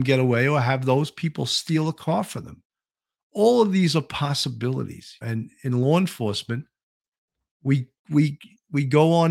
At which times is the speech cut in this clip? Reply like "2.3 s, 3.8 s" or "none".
5.2 s